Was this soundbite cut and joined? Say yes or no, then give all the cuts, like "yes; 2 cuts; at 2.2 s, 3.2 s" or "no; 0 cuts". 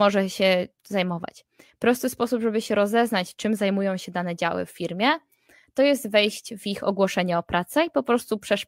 no; 0 cuts